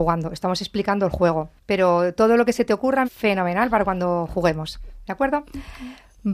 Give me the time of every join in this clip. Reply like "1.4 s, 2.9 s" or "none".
1.6 s, 3.0 s

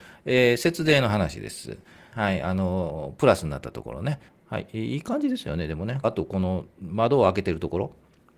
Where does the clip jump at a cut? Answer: 2.1 s, 4.3 s, 6.0 s

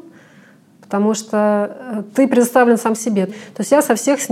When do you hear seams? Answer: 3.3 s

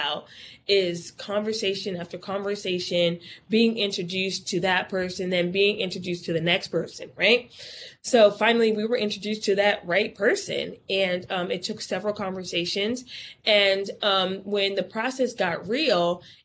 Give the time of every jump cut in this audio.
none

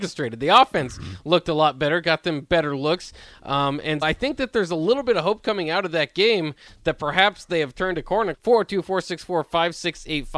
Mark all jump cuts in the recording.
4.0 s, 8.3 s

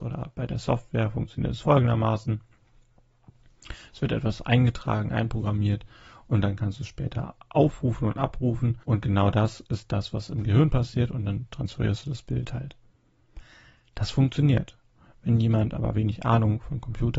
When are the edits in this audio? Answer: 8.8 s

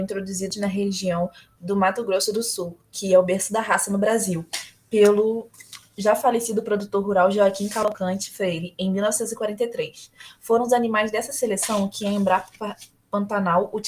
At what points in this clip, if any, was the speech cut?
none

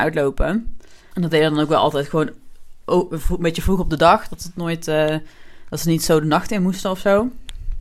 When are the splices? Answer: 1.1 s

